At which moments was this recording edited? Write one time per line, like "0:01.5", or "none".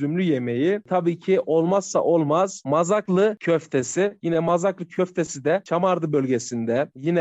none